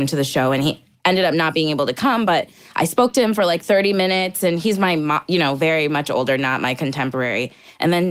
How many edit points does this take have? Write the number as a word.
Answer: zero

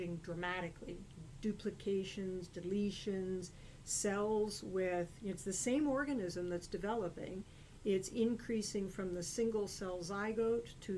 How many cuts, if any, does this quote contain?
zero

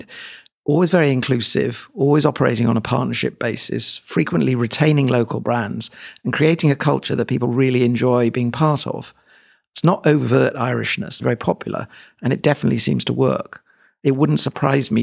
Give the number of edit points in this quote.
one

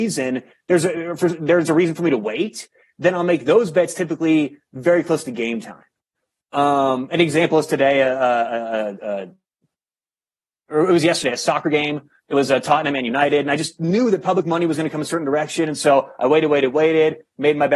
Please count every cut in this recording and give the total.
zero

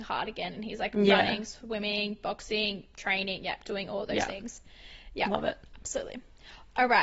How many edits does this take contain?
zero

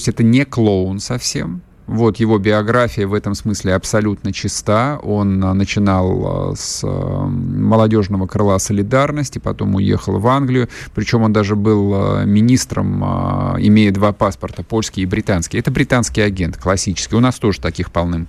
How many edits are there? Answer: zero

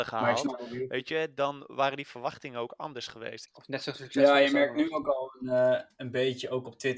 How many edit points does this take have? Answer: one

